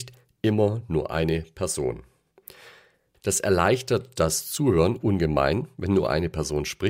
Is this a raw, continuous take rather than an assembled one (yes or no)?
yes